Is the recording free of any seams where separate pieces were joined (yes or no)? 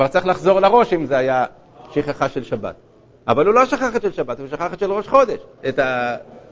no